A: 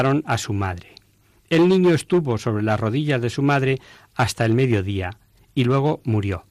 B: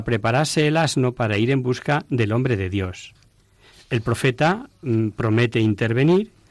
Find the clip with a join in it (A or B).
B